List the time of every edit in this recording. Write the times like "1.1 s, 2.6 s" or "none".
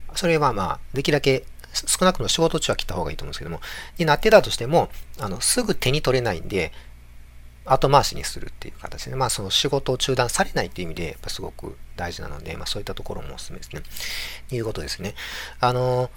14.5 s